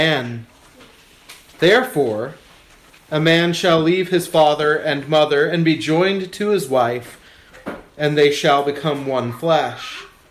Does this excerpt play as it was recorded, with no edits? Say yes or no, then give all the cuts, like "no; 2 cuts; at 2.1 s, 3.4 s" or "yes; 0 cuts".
yes; 0 cuts